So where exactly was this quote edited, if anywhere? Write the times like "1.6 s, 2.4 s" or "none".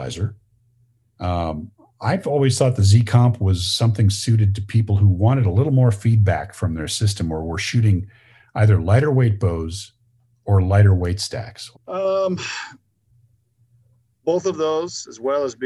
1.1 s, 11.7 s